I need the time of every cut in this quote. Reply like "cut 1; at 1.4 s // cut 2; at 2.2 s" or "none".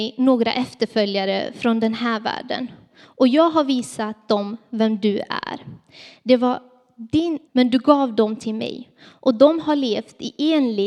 cut 1; at 7.5 s

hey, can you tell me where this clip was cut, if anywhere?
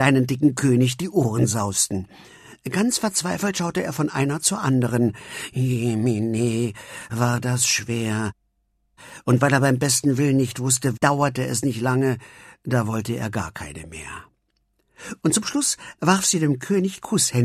cut 1; at 10.9 s // cut 2; at 15.2 s

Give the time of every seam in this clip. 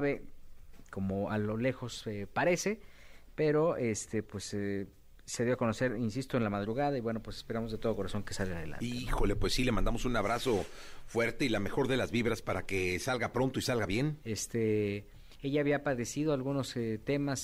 cut 1; at 14.2 s

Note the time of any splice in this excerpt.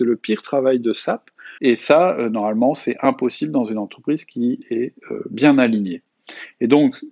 cut 1; at 1.6 s

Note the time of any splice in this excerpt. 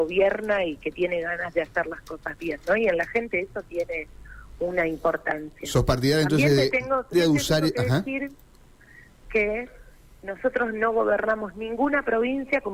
cut 1; at 7.1 s

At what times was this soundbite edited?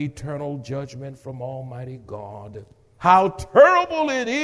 cut 1; at 3.0 s

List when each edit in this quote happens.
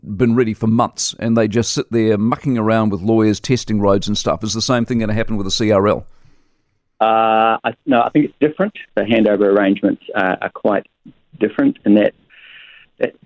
cut 1; at 8.9 s

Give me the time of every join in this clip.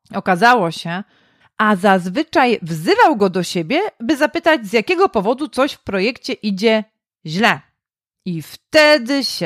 cut 1; at 1.4 s

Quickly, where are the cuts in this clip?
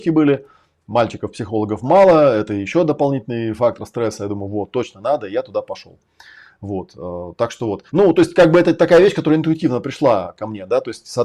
cut 1; at 7.9 s

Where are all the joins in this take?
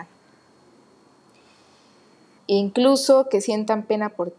cut 1; at 2.4 s

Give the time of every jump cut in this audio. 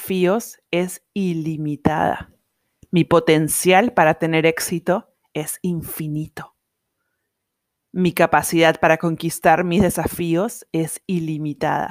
none

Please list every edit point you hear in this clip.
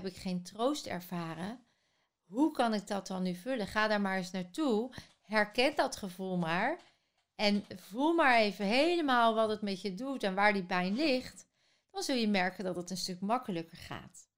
none

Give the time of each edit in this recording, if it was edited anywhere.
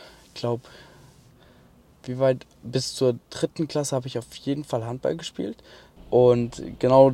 cut 1; at 6.0 s

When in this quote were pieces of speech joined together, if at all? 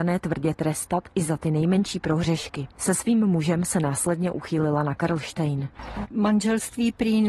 cut 1; at 6.0 s

